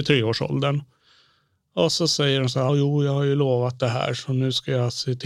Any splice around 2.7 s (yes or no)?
yes